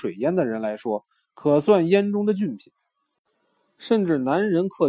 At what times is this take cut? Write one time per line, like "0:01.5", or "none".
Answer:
none